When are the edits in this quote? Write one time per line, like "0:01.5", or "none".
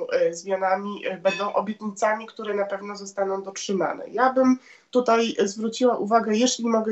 none